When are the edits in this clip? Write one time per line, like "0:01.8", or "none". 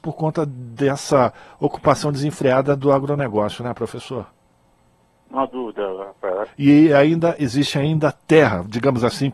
0:06.4